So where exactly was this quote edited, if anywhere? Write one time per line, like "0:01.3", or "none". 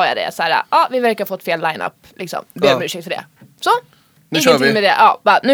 none